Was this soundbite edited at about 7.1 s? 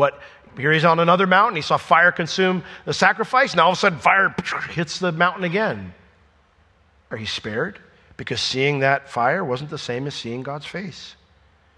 yes; 1 cut; at 7.1 s

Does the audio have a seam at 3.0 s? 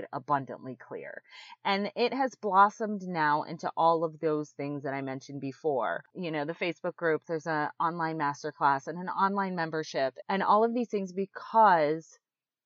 no; 3 cuts; at 1.5 s, 7.2 s, 10.2 s

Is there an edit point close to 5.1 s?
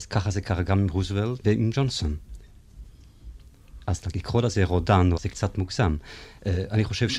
yes; 2 cuts; at 1.4 s, 5.1 s

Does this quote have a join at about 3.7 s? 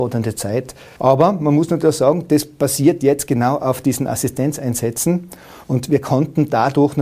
no; 2 cuts; at 1.0 s, 5.6 s

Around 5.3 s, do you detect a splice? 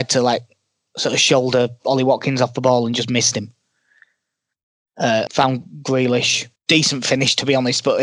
yes; 2 cuts; at 5.3 s, 6.6 s

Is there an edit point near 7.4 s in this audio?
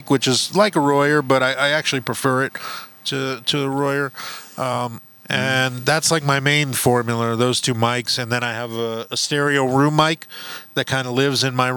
no; 1 cut; at 5.1 s

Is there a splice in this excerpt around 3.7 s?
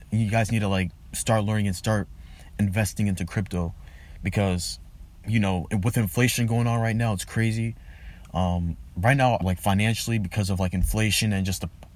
no; 1 cut; at 9.4 s

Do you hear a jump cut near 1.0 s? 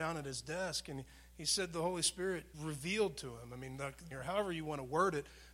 no; 2 cuts; at 2.5 s, 4.1 s

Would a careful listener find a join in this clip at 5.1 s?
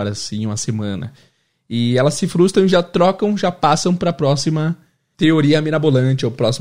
yes; 1 cut; at 5.1 s

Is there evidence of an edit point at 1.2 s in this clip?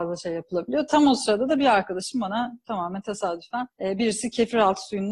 no; 1 cut; at 3.7 s

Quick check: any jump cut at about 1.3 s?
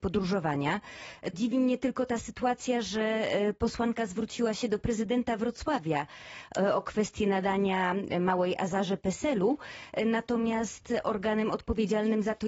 yes; 1 cut; at 1.3 s

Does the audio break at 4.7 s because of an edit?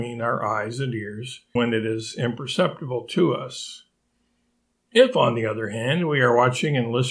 no; 1 cut; at 1.6 s

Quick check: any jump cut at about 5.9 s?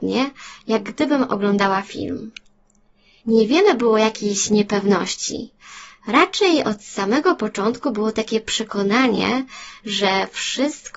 no; 1 cut; at 3.2 s

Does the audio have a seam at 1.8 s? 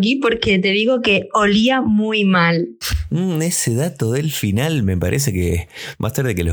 no; 0 cuts

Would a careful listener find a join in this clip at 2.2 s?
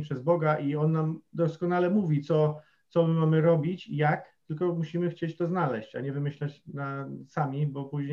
no; 0 cuts

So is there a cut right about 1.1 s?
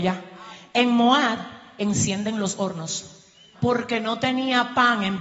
no; 1 cut; at 3.5 s

